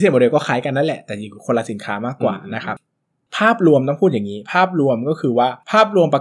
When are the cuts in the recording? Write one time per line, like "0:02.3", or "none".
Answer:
none